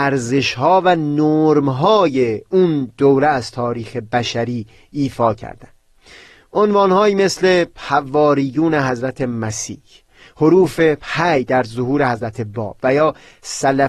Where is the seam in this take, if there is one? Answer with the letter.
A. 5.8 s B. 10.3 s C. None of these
C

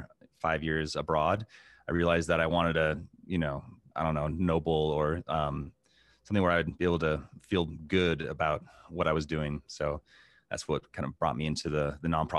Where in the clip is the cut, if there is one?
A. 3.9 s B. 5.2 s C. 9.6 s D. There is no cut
A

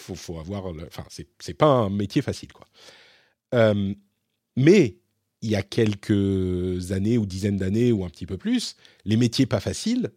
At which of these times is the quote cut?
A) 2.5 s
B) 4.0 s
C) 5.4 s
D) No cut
D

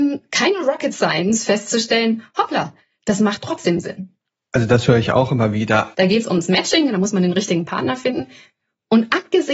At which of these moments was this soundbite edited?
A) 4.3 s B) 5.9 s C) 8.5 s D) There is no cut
B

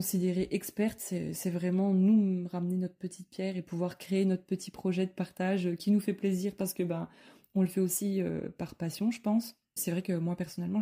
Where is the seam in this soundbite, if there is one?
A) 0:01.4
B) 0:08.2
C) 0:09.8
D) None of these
C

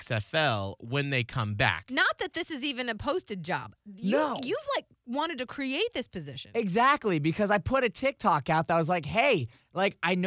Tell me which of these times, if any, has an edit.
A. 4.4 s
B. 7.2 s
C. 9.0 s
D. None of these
D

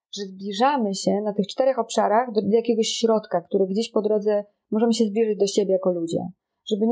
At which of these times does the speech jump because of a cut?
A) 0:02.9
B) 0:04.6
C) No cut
C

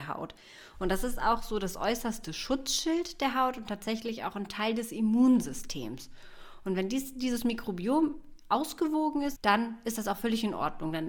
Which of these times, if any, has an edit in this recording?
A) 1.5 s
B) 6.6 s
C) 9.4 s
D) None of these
C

